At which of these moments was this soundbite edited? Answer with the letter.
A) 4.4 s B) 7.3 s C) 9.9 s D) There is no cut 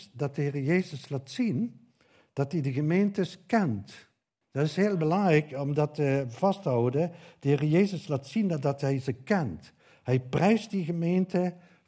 A